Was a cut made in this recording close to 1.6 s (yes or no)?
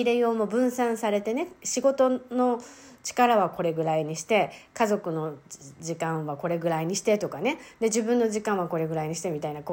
no